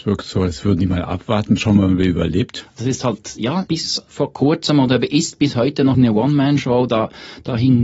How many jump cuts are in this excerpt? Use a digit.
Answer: 2